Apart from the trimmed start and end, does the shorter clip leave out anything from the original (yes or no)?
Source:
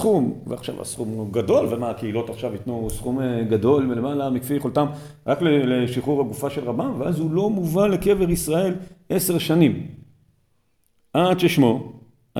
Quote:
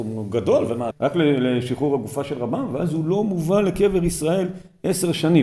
yes